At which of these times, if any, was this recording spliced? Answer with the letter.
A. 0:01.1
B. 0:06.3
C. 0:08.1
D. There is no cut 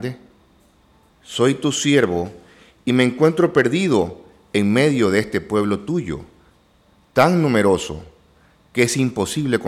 A